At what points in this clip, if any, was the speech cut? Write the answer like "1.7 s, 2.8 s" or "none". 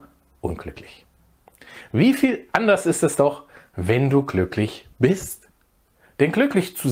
none